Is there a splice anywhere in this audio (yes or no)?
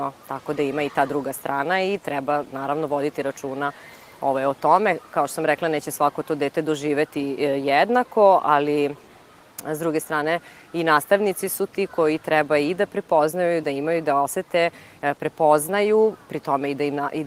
no